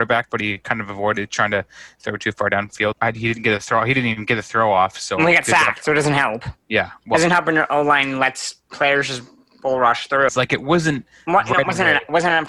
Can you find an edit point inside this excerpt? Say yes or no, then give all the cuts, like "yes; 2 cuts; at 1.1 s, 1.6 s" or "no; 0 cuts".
yes; 3 cuts; at 2.9 s, 6.6 s, 10.3 s